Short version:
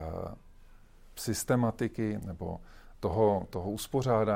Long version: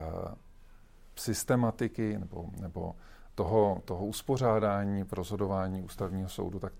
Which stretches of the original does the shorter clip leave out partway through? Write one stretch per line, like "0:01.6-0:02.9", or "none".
0:02.2-0:02.5

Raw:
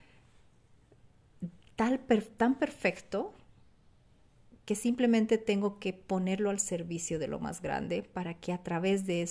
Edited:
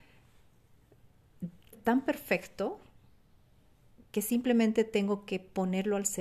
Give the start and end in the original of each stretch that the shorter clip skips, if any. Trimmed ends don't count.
0:01.7-0:02.3

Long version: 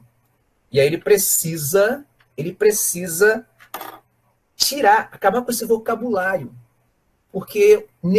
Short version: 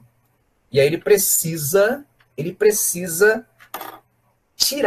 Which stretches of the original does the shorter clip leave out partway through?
none

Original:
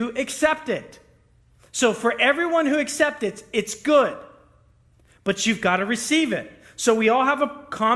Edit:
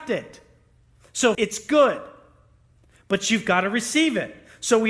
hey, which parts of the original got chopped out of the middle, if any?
0:01.9-0:03.5

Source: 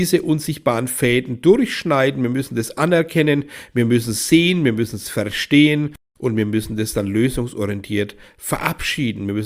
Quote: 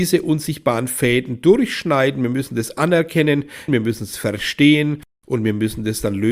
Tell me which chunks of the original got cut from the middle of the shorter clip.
0:03.7-0:04.6

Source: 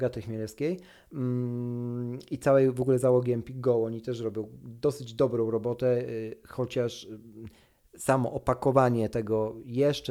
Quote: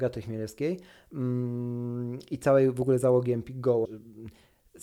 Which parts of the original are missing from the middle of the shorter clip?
0:03.8-0:07.0

